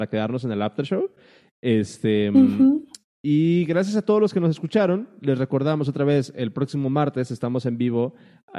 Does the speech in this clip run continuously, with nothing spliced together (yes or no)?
yes